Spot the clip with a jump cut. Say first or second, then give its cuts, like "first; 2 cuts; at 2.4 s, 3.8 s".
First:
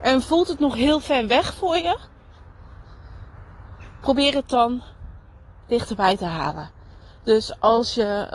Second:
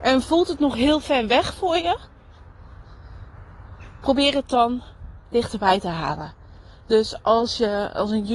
second; 1 cut; at 5.2 s